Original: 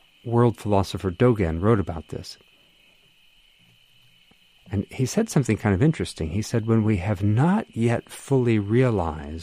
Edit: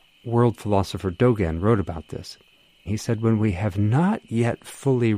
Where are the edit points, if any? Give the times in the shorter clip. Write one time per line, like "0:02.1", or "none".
0:02.9